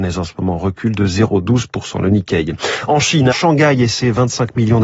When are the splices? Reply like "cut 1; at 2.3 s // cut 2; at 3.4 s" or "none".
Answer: cut 1; at 3.3 s